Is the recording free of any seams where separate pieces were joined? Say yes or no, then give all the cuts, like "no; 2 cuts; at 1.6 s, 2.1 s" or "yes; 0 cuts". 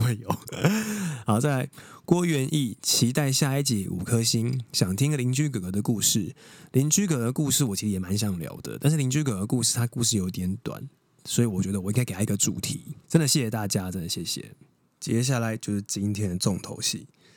no; 1 cut; at 13.0 s